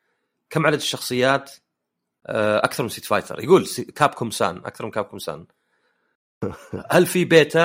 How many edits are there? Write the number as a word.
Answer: zero